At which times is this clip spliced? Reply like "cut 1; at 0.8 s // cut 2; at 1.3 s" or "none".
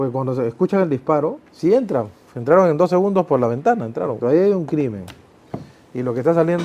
cut 1; at 1.5 s // cut 2; at 4.2 s